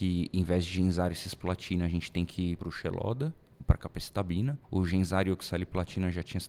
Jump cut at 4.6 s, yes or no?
yes